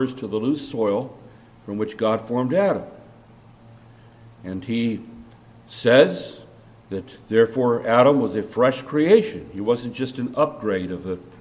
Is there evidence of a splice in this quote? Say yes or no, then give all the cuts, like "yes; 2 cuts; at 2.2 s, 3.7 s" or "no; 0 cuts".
no; 0 cuts